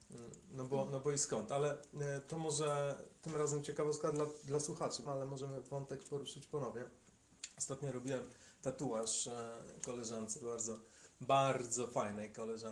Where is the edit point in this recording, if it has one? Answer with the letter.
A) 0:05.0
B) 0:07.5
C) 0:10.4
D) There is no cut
A